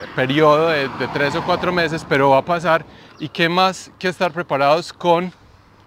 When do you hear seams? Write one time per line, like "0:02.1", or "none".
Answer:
0:03.1